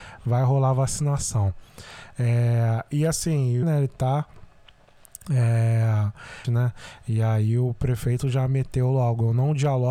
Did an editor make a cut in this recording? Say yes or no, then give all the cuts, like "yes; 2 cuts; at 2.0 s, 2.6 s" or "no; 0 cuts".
yes; 2 cuts; at 3.6 s, 6.4 s